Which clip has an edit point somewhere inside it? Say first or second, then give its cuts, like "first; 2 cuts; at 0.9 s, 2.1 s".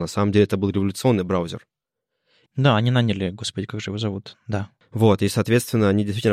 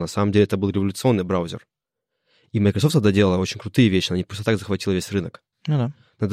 first; 1 cut; at 2.5 s